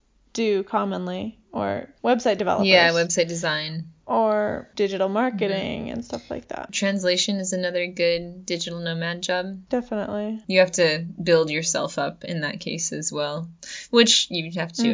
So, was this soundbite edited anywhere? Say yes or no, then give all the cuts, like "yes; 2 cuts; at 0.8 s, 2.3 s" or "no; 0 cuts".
no; 0 cuts